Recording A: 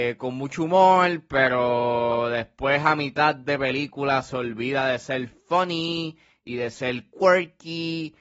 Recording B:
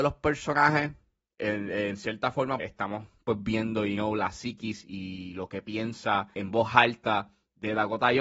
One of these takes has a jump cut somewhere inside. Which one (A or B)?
B